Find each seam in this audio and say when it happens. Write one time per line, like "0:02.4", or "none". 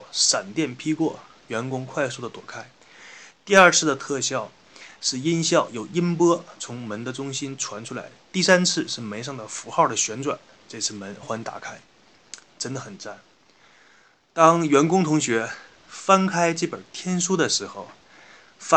0:11.2